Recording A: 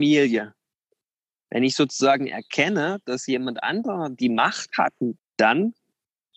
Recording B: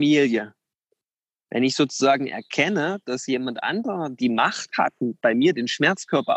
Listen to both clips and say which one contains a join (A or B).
A